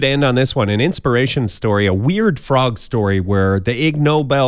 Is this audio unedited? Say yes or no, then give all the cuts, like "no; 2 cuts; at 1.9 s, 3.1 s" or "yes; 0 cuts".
yes; 0 cuts